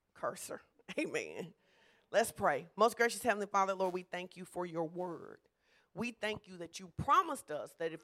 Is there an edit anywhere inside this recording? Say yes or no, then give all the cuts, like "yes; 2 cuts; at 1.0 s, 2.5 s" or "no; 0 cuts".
no; 0 cuts